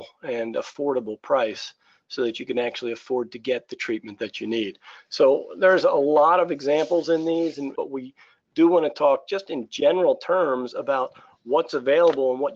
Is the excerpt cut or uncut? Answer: cut